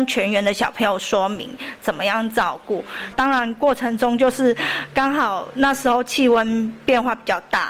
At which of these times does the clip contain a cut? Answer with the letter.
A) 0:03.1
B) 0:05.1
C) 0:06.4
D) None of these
A